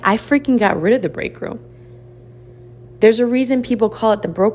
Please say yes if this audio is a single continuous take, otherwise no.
yes